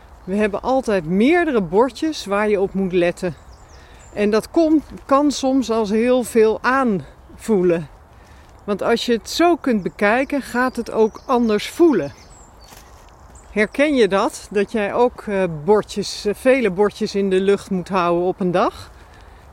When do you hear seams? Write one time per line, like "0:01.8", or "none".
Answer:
0:08.5